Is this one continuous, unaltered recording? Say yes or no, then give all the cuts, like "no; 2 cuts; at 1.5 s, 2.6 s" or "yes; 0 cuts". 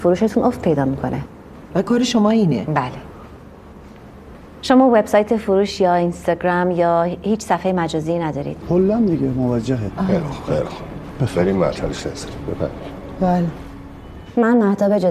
no; 2 cuts; at 4.6 s, 8.6 s